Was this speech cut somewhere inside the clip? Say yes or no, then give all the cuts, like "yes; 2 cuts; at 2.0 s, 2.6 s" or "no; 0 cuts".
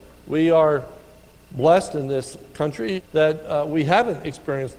yes; 1 cut; at 3.0 s